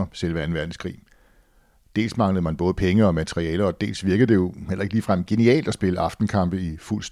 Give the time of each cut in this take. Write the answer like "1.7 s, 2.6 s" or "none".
none